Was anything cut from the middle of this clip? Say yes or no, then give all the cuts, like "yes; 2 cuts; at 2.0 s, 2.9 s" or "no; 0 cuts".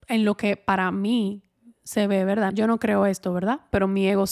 yes; 1 cut; at 2.5 s